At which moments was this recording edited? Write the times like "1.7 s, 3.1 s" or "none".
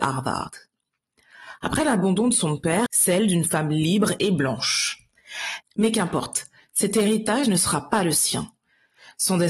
2.9 s, 5.6 s